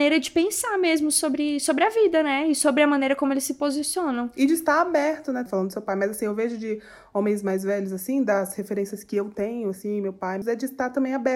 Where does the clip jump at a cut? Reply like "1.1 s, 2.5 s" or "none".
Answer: 5.5 s, 10.4 s